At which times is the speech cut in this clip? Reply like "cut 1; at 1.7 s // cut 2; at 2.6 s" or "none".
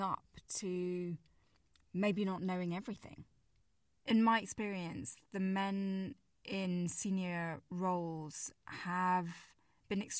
none